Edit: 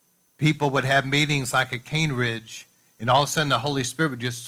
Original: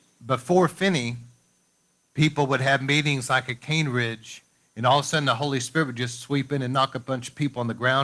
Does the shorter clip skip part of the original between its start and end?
no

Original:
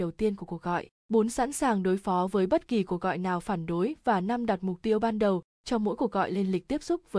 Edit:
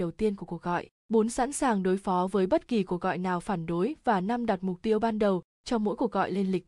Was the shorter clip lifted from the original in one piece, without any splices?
yes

